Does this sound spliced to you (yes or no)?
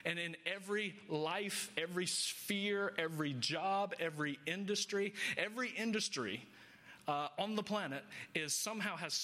no